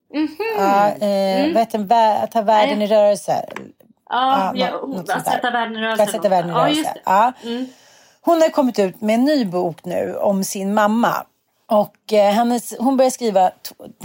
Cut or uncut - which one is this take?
uncut